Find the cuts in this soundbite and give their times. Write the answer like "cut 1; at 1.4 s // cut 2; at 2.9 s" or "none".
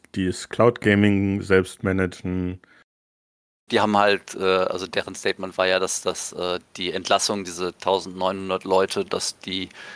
cut 1; at 3.7 s